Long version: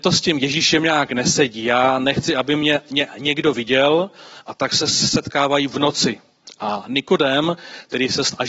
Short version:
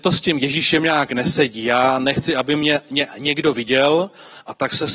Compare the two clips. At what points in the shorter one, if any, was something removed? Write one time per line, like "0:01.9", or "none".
none